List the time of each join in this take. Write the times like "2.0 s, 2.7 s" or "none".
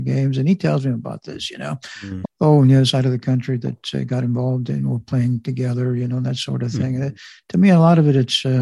2.2 s